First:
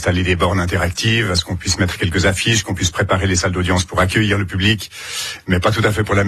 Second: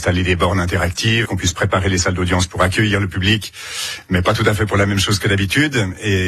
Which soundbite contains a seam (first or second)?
second